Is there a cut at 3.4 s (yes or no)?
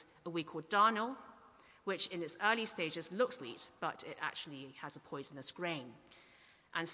yes